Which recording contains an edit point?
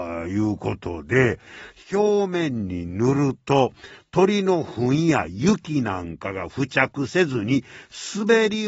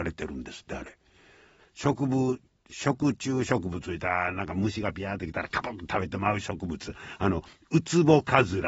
second; 1 cut; at 1.6 s

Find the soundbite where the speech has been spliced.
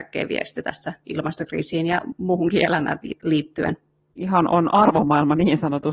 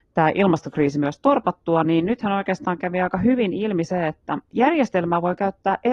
first; 1 cut; at 4.1 s

